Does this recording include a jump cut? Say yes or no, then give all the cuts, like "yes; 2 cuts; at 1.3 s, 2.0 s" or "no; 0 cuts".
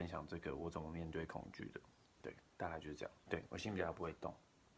yes; 2 cuts; at 2.0 s, 3.2 s